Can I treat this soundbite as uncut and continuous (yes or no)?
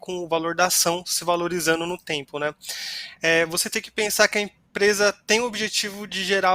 no